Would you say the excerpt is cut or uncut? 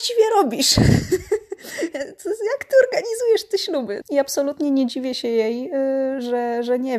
cut